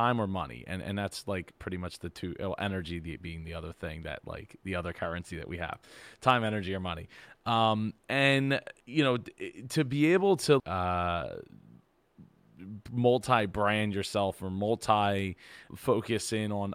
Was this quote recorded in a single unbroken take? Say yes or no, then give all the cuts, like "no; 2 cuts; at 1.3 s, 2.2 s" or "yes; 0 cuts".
no; 3 cuts; at 8.8 s, 10.6 s, 15.7 s